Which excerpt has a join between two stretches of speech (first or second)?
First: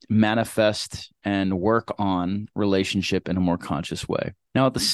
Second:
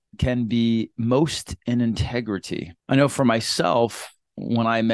second